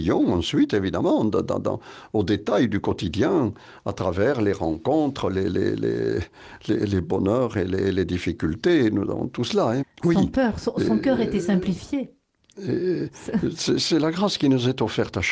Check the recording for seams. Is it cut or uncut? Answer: cut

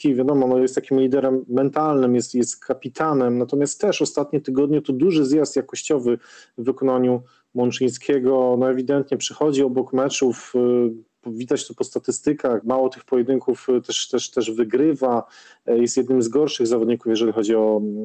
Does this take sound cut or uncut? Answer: cut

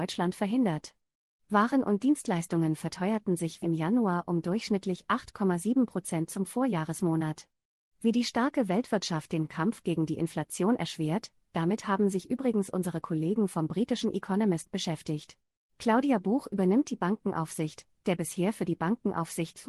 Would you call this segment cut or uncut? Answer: cut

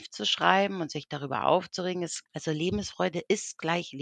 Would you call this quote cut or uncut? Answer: cut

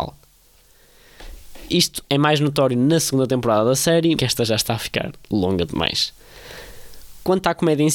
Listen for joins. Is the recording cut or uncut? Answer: cut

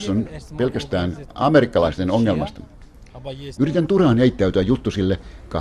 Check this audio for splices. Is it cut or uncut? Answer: cut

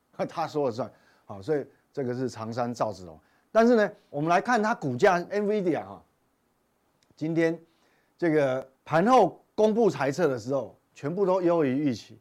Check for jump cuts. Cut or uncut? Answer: cut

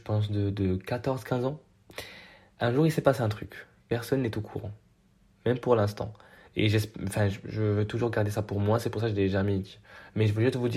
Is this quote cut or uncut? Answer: uncut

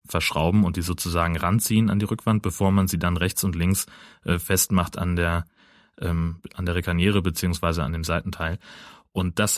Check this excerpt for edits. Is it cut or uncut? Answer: uncut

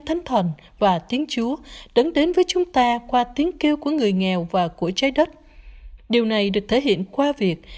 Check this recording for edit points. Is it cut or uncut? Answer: cut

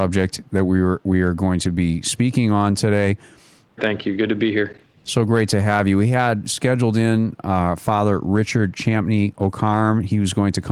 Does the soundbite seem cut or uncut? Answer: cut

